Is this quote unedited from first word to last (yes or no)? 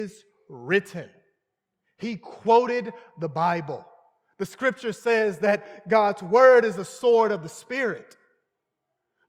yes